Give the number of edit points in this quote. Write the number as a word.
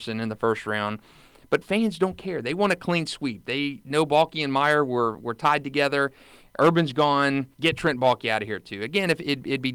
one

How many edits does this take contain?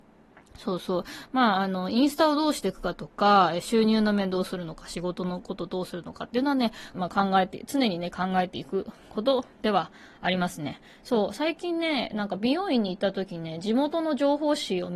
one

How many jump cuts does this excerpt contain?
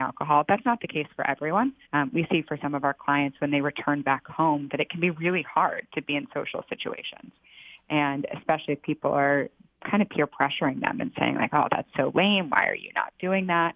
one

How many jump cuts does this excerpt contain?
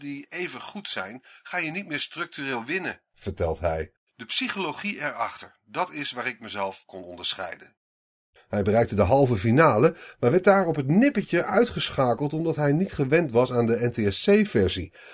one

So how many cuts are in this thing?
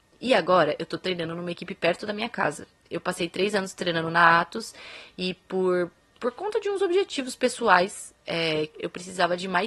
one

